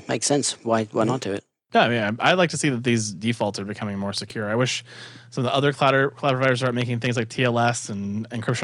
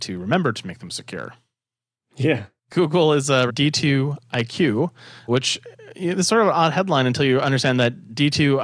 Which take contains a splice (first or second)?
second